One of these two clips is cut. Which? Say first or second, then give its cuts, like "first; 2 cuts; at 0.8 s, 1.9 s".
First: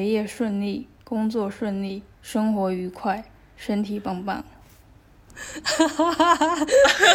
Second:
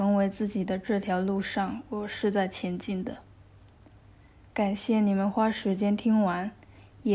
first; 1 cut; at 2.1 s